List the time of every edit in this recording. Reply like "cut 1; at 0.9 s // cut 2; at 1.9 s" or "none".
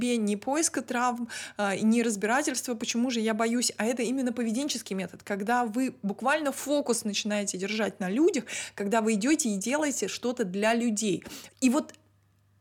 cut 1; at 11.5 s